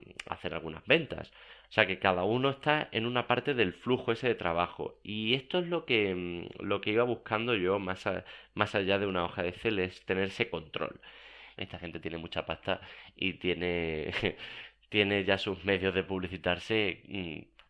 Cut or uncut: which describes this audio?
cut